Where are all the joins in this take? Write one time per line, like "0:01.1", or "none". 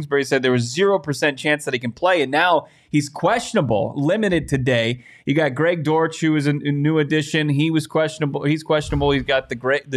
none